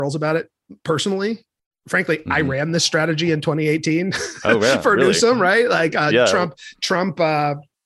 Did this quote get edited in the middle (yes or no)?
no